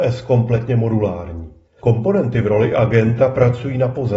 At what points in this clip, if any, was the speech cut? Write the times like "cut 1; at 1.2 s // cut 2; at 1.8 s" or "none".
cut 1; at 1.8 s